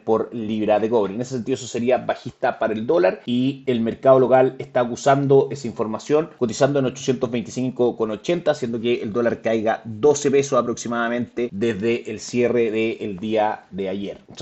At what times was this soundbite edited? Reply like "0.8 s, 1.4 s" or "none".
none